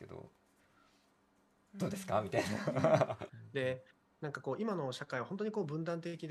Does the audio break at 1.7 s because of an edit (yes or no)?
no